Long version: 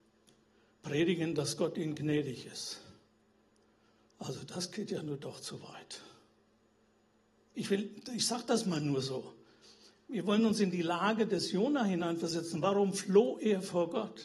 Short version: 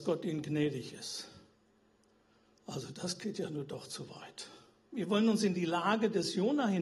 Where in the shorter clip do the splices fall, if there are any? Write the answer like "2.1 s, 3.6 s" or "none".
4.9 s